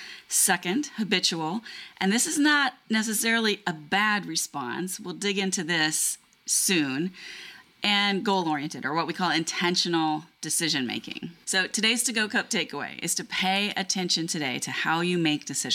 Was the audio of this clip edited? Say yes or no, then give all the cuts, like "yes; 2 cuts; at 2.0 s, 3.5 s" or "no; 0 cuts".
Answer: yes; 1 cut; at 11.4 s